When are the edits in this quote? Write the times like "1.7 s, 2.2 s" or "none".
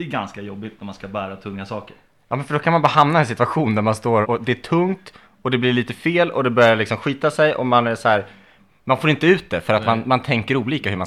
4.2 s